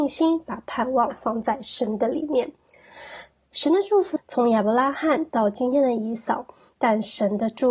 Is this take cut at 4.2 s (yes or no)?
yes